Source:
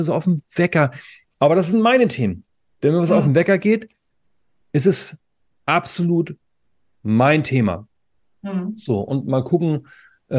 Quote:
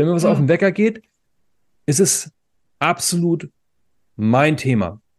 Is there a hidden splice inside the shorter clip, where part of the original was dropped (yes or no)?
no